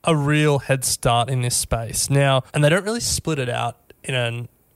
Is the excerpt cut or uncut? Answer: cut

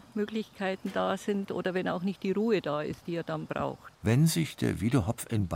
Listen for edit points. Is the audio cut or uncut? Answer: cut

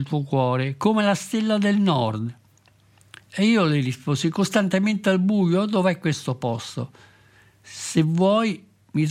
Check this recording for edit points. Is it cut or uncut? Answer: uncut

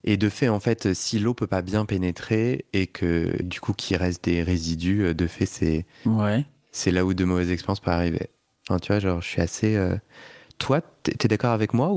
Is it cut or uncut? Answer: cut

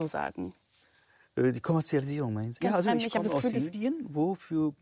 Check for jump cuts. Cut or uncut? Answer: cut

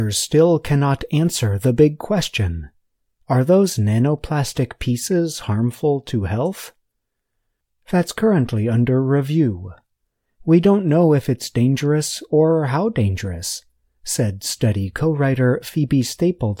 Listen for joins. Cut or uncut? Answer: uncut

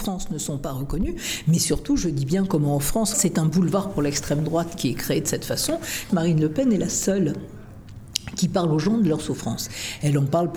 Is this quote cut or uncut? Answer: cut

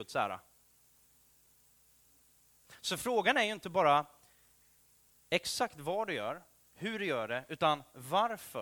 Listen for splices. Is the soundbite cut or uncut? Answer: uncut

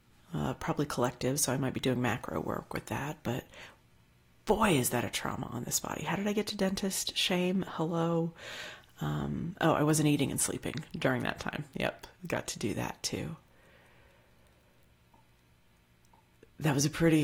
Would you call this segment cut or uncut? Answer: uncut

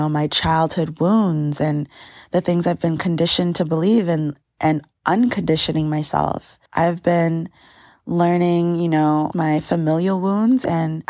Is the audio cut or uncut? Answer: cut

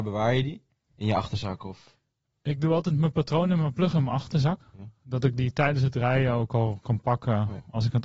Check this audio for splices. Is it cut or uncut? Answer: uncut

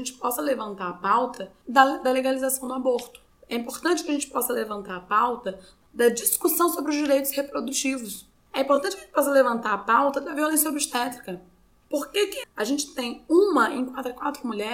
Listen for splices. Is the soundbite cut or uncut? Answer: cut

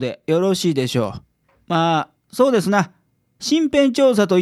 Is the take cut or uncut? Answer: uncut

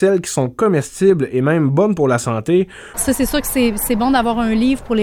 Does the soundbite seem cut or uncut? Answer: cut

